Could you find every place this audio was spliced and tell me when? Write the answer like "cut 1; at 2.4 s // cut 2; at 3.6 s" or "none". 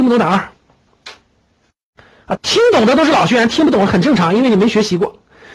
cut 1; at 2.4 s